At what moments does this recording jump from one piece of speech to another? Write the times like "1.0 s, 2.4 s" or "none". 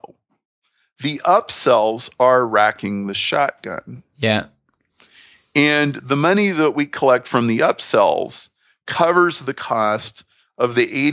none